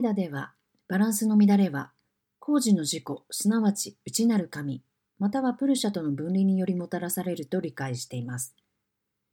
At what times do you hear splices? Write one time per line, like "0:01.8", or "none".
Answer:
none